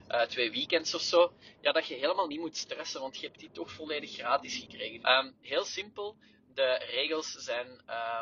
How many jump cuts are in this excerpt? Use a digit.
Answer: 1